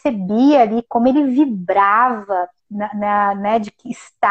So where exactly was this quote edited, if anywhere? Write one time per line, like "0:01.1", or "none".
0:02.6